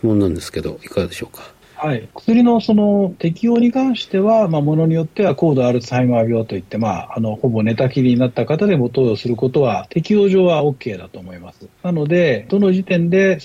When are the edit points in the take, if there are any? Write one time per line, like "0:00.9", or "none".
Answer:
0:02.1

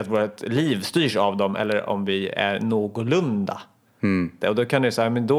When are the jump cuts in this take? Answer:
0:04.4

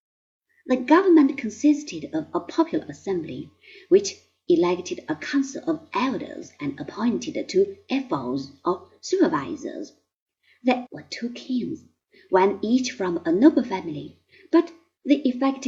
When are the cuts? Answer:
0:10.9

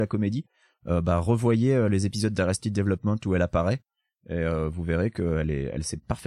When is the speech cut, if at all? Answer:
none

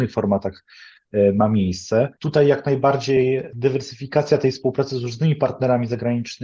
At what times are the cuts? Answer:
0:02.2

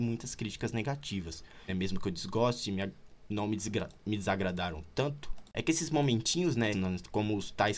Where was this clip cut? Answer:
0:01.7
0:06.7

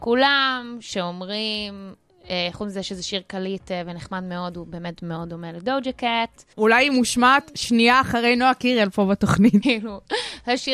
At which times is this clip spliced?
0:06.5
0:09.6

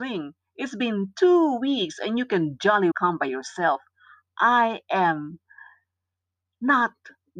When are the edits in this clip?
0:02.9

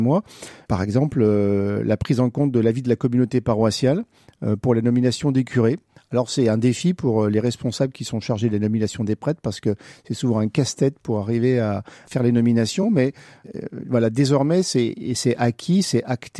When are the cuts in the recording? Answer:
none

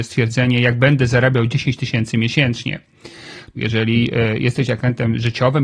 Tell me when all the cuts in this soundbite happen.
0:03.5

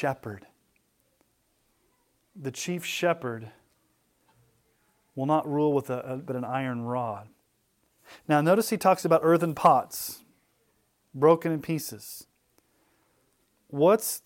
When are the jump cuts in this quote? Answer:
0:06.2

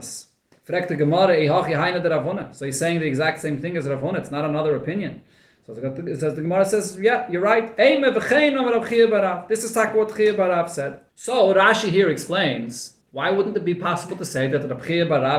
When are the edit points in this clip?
0:11.1
0:13.0

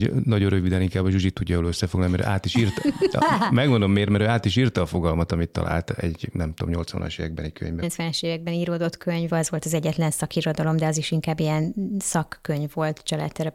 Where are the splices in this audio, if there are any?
0:07.8
0:09.3

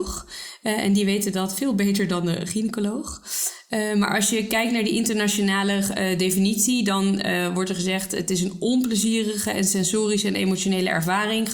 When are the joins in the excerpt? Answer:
none

